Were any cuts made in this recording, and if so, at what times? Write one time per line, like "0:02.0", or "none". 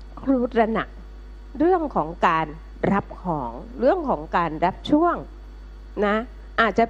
none

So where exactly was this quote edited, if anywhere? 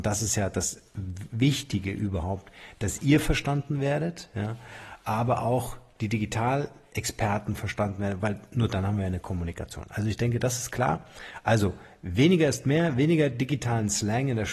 none

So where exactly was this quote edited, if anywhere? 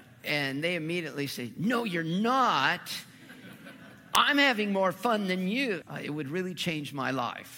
0:05.8

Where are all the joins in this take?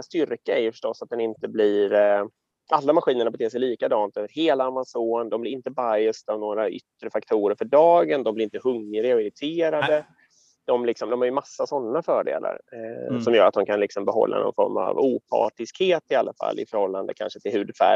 none

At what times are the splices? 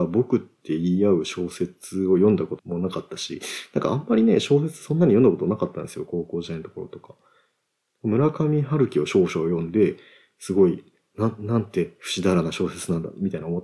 0:02.6

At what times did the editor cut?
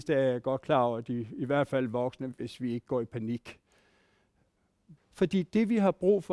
0:02.3
0:05.0

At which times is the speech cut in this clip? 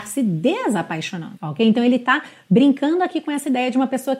0:01.3

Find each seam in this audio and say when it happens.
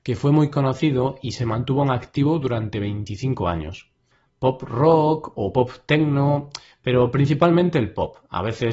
0:04.2

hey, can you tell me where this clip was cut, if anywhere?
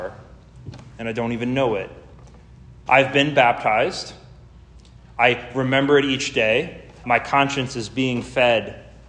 0:02.9
0:07.0

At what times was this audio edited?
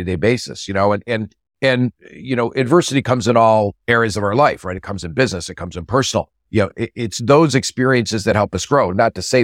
none

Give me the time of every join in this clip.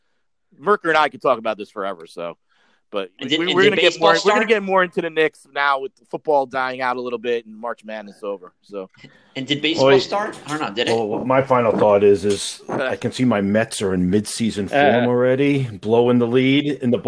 none

